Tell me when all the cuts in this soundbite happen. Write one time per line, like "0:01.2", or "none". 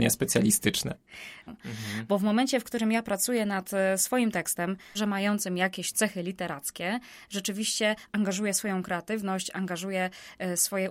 0:01.5
0:04.9